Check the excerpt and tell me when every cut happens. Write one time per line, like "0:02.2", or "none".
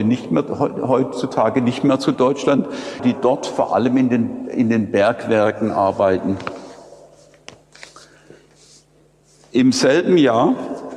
0:03.0